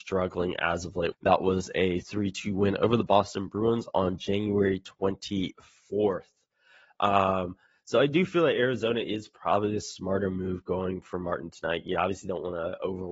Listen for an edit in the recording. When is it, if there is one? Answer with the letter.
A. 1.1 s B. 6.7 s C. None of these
A